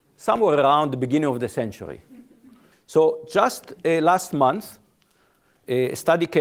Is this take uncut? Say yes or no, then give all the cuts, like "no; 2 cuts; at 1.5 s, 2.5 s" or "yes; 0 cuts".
no; 1 cut; at 2.7 s